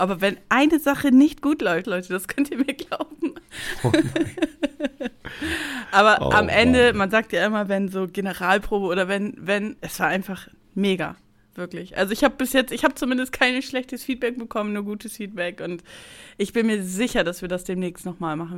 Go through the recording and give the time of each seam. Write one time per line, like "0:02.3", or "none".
0:01.8
0:09.8